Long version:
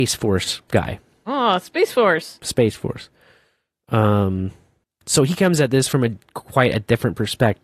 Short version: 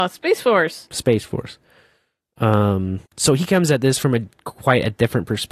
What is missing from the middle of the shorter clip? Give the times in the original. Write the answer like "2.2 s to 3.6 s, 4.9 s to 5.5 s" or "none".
4.6 s to 5.0 s